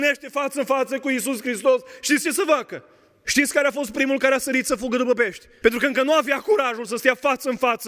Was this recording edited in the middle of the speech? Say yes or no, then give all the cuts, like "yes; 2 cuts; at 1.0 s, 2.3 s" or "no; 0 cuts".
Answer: yes; 2 cuts; at 3.2 s, 5.6 s